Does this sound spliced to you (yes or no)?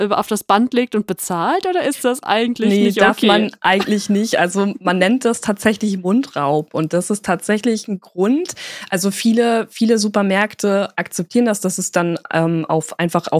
no